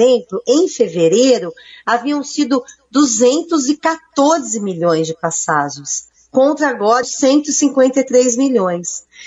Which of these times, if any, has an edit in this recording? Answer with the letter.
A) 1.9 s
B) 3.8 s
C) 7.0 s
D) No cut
C